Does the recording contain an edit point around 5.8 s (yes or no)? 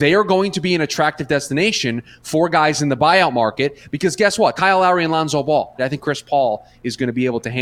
yes